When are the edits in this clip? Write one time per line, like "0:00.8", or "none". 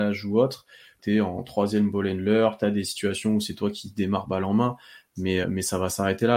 0:01.0
0:05.4